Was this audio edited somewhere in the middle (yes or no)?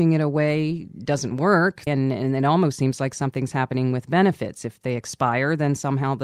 yes